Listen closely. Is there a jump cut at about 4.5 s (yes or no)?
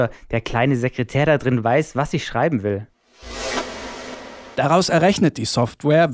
yes